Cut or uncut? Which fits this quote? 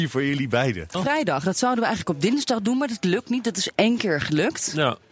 cut